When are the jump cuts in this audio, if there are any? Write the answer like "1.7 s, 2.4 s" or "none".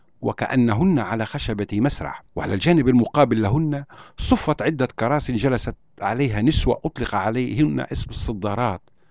2.3 s